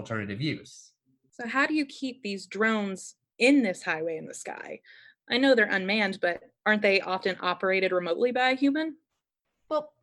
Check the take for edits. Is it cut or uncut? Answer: uncut